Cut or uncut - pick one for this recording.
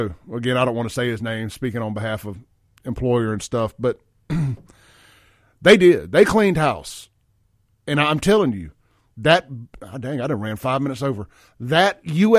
uncut